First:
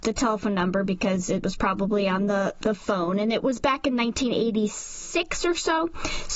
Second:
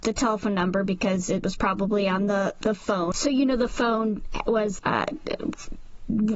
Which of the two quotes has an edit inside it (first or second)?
second